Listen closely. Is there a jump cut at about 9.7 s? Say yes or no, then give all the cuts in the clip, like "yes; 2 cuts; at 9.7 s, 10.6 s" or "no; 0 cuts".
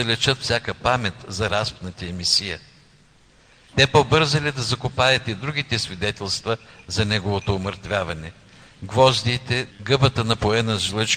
yes; 2 cuts; at 3.7 s, 9.7 s